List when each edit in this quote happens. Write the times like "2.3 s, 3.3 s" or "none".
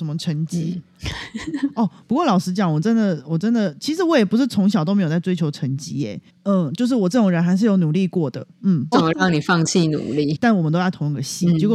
6.3 s, 8.9 s, 10.3 s